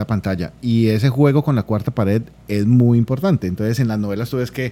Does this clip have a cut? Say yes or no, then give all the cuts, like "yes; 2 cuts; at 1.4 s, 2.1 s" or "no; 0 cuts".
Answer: no; 0 cuts